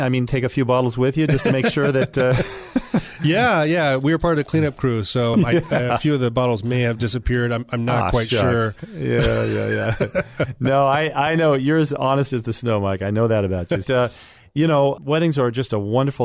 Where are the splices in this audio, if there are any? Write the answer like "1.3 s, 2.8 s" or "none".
5.3 s, 13.8 s, 15.0 s